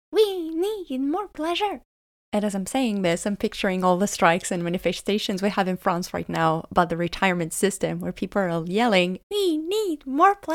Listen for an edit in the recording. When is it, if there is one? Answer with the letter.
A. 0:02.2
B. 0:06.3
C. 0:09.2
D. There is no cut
C